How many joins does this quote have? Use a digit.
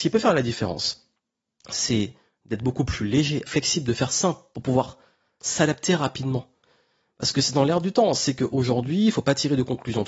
1